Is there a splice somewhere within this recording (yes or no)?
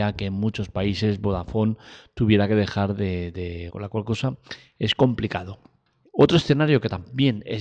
yes